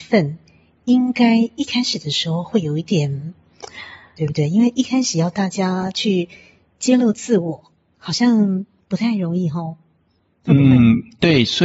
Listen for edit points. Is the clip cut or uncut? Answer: cut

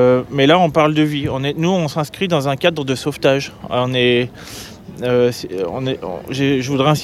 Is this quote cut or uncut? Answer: uncut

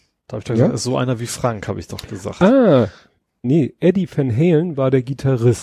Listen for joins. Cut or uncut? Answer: cut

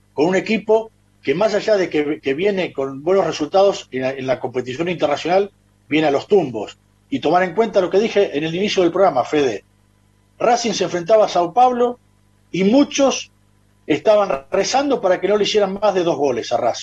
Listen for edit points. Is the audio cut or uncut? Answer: uncut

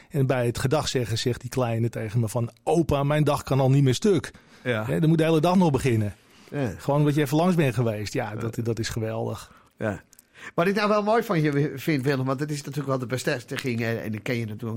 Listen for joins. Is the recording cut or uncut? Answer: cut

